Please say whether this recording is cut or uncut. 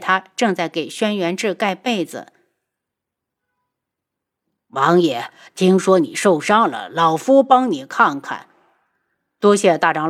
uncut